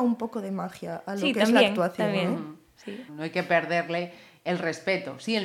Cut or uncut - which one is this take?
cut